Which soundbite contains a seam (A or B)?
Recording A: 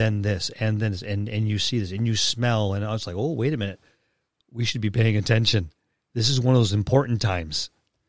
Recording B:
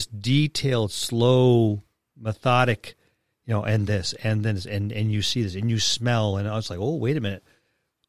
B